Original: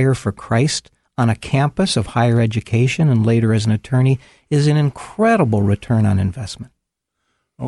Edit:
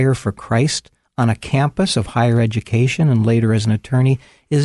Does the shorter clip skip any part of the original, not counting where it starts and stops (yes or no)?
no